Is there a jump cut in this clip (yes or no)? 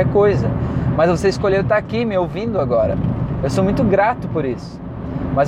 no